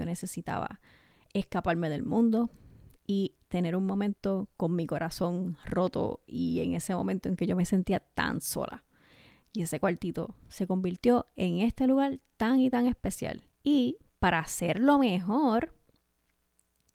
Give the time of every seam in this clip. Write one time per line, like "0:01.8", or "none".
0:13.5